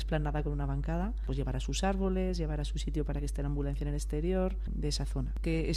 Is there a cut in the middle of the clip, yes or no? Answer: yes